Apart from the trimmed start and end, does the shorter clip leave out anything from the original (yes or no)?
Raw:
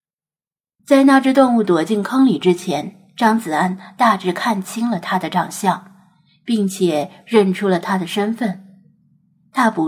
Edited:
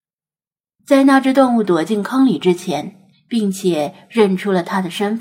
yes